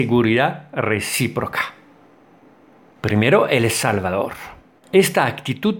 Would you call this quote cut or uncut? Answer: cut